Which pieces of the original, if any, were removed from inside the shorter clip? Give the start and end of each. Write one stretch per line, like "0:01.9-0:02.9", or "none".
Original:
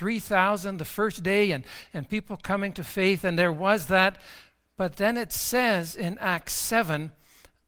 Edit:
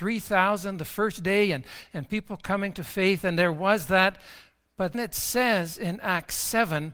0:04.9-0:05.1